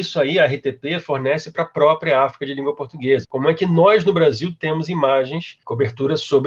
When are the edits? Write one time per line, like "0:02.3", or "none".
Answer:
0:03.2